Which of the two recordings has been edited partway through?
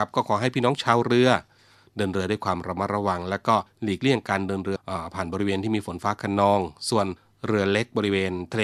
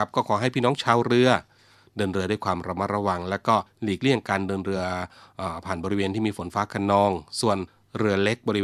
first; 1 cut; at 4.8 s

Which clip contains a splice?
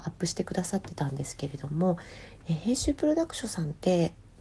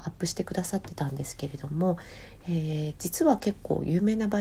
first; 1 cut; at 2.4 s

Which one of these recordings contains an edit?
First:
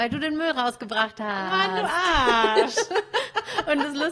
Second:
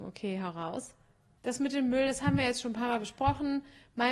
second; 1 cut; at 1.4 s

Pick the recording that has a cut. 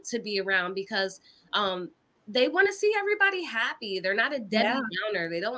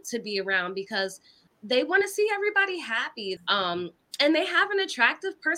second; 2 cuts; at 1.5 s, 3.4 s

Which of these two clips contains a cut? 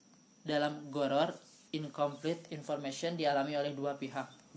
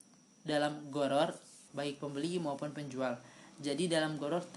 second; 1 cut; at 1.7 s

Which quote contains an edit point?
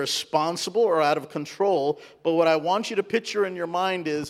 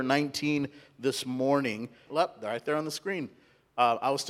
second; 1 cut; at 2.1 s

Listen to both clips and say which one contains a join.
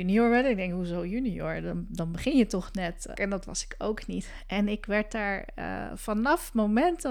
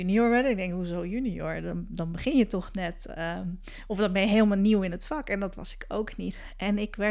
first; 1 cut; at 3.2 s

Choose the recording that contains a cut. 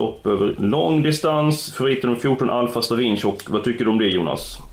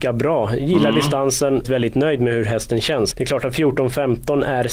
second; 2 cuts; at 1.6 s, 3.1 s

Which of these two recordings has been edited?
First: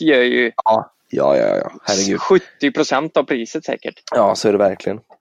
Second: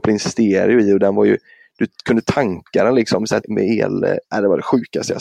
second; 1 cut; at 3.4 s

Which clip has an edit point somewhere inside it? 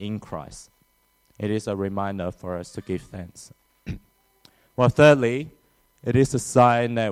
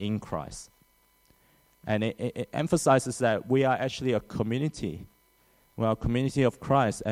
first; 1 cut; at 1.3 s

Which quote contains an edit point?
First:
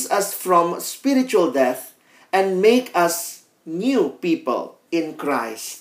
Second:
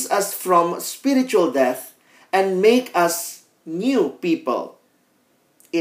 first; 1 cut; at 4.9 s

